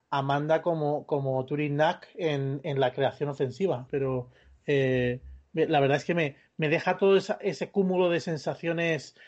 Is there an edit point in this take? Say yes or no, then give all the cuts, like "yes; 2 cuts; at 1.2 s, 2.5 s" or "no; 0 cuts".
yes; 1 cut; at 3.9 s